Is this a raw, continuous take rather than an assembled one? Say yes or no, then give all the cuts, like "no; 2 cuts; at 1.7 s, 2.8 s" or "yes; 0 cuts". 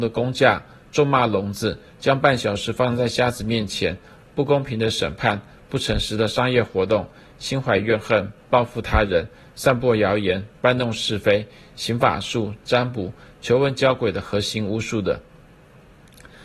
yes; 0 cuts